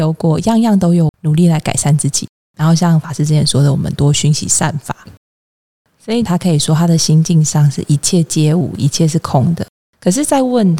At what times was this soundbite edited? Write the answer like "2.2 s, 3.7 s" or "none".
1.1 s, 5.1 s, 6.3 s